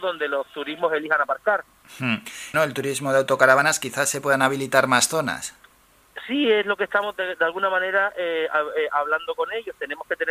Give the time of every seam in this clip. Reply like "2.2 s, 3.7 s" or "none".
2.5 s

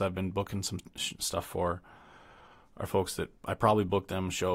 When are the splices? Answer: none

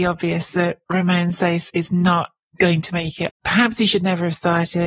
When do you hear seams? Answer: 3.3 s

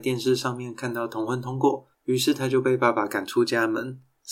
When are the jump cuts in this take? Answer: 1.9 s

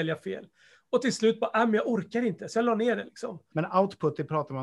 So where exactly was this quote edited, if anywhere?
3.5 s

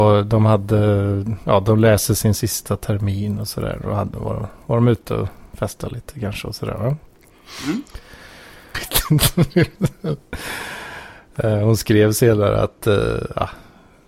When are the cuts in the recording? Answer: 8.7 s

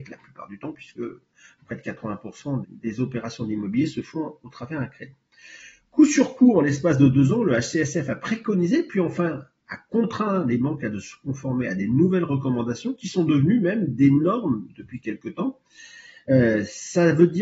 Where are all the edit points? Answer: 2.6 s

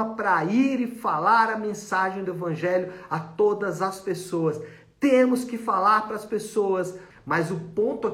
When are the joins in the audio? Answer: 7.1 s

